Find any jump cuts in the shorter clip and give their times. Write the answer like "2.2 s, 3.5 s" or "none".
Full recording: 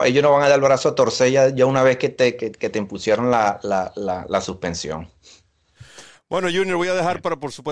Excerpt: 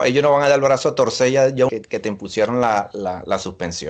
1.7 s, 2.9 s